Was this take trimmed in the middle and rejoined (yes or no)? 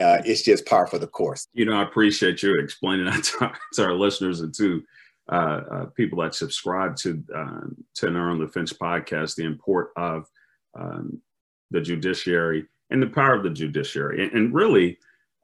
yes